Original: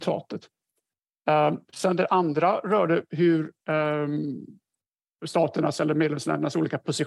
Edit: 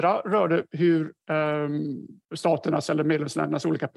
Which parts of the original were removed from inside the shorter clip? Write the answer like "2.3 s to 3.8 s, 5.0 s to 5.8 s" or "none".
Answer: 4.6 s to 5.2 s